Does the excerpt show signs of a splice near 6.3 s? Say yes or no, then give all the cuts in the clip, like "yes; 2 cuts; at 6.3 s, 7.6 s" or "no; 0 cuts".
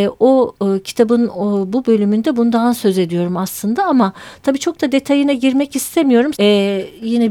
yes; 1 cut; at 6.3 s